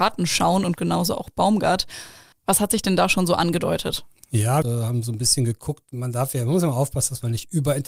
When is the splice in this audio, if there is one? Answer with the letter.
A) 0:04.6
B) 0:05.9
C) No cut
A